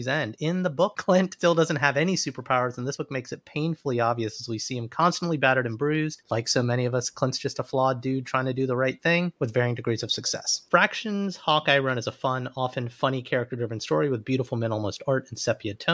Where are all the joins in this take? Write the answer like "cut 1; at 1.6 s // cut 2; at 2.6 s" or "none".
cut 1; at 10.7 s